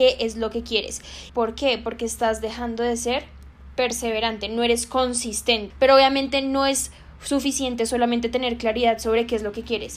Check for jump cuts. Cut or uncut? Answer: cut